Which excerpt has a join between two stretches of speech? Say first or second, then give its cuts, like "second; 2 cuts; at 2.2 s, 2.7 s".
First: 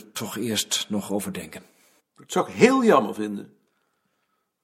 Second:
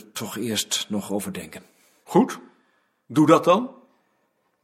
first; 1 cut; at 2.0 s